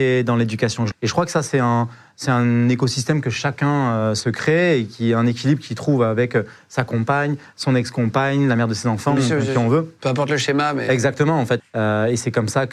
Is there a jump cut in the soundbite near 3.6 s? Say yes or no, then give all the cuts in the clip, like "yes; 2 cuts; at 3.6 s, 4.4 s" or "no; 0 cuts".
no; 2 cuts; at 0.9 s, 11.6 s